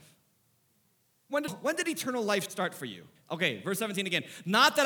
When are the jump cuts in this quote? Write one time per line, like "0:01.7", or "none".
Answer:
0:01.5
0:03.2

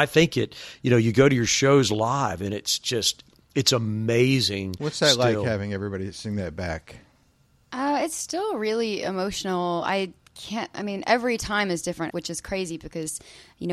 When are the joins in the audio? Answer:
0:12.1

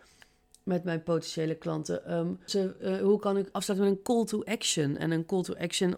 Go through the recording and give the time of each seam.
0:02.5
0:03.5

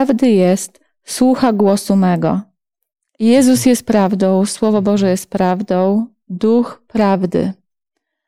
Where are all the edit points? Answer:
0:03.1

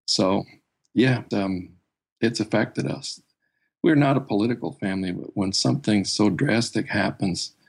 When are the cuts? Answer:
0:01.3

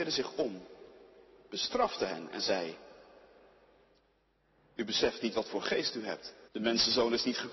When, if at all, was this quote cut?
0:06.5

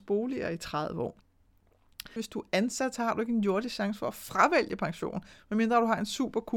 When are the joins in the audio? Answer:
0:02.2

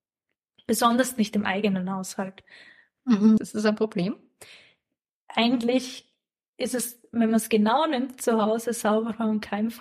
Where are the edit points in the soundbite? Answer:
0:03.4

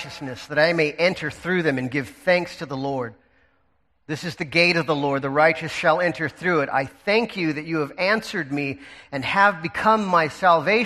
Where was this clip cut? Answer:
none

